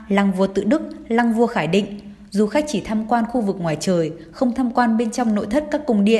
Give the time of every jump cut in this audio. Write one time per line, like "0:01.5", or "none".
none

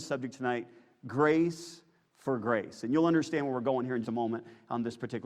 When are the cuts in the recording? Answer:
0:04.0

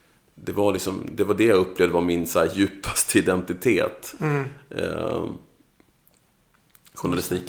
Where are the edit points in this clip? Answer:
none

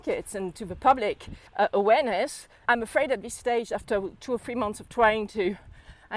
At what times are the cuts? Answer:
0:01.5
0:02.6

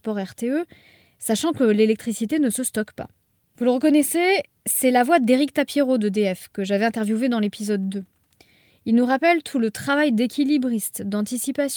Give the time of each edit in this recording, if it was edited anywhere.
0:03.5
0:08.7

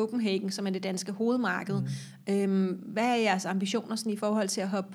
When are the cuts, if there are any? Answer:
none

